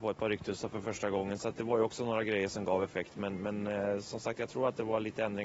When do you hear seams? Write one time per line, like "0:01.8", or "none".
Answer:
none

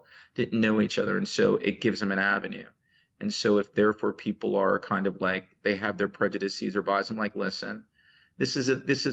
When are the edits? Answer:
none

